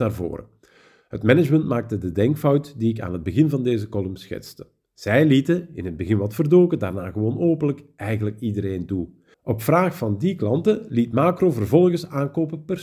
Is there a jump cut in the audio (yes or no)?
yes